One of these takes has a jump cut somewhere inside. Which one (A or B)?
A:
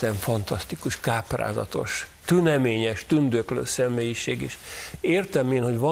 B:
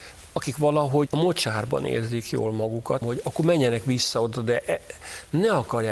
B